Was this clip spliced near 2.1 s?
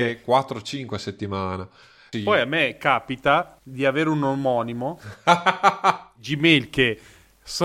yes; 1 cut; at 2.1 s

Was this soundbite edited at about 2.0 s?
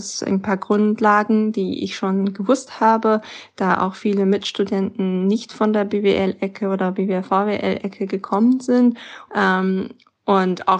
no; 1 cut; at 9.3 s

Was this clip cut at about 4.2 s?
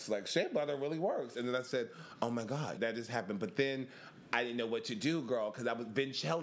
no; 1 cut; at 2.8 s

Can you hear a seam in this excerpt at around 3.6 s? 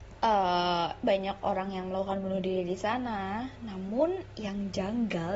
no; 1 cut; at 1.0 s

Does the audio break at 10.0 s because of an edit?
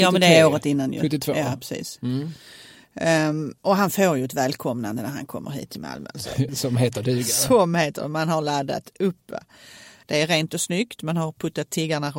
yes; 2 cuts; at 6.5 s, 10.0 s

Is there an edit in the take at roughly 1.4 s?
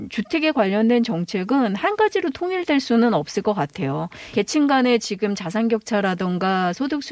no; 1 cut; at 4.3 s

